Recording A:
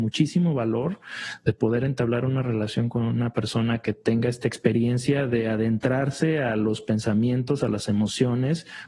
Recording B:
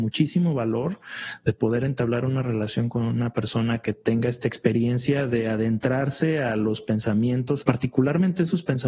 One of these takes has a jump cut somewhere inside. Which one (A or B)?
B